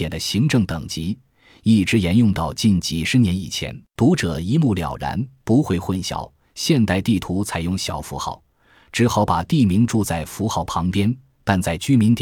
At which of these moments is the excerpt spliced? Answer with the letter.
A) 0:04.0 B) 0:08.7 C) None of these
A